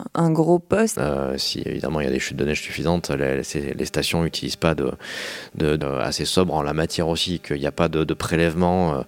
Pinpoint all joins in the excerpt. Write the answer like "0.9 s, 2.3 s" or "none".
1.0 s, 5.8 s